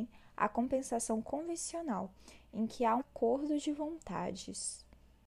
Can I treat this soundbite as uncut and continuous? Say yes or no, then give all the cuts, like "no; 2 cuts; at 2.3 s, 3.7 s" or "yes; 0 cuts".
no; 1 cut; at 3.0 s